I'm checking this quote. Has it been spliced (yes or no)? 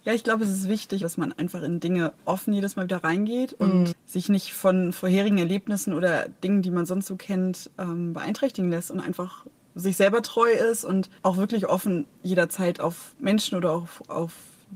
yes